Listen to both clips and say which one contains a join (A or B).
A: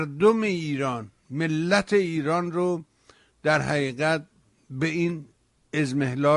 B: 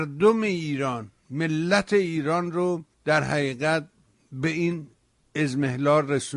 B